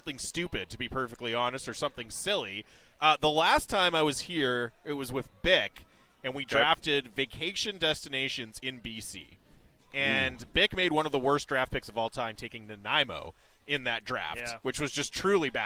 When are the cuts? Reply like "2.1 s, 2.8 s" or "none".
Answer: none